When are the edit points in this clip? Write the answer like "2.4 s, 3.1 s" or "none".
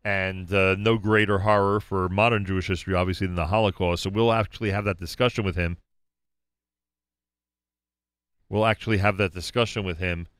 none